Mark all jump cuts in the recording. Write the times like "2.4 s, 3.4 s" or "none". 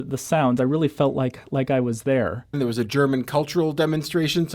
2.5 s